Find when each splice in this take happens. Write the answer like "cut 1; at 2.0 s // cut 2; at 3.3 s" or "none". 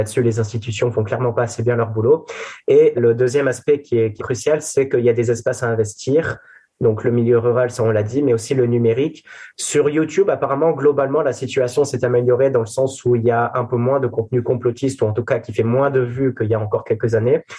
cut 1; at 3.0 s // cut 2; at 4.2 s